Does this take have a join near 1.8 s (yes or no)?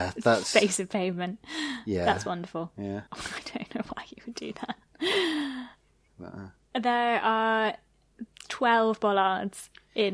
no